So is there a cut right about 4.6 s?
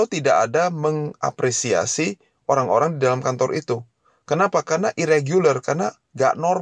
no; 0 cuts

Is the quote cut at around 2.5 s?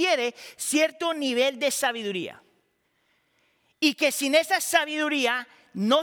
no; 0 cuts

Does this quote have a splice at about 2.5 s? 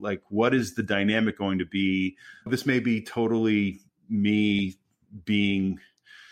yes; 1 cut; at 2.5 s

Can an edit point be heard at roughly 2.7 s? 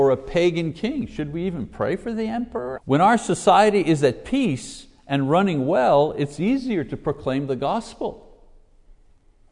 yes; 1 cut; at 2.7 s

